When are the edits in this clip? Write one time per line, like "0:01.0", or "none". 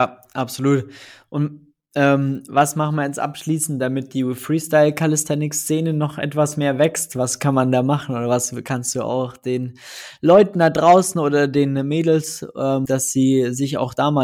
0:12.9